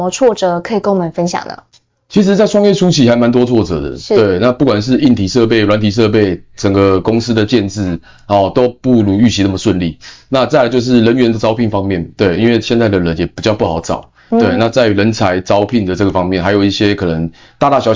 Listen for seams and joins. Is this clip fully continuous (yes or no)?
yes